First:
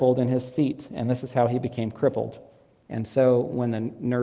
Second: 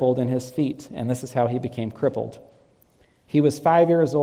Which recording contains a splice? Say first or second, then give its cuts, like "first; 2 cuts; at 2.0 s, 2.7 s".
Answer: first; 1 cut; at 2.9 s